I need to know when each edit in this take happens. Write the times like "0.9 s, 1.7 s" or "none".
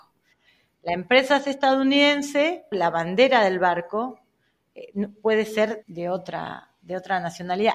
2.7 s, 5.8 s